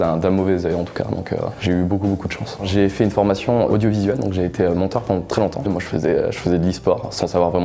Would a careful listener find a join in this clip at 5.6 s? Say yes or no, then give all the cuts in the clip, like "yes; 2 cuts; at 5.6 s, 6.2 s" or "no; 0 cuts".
yes; 1 cut; at 5.6 s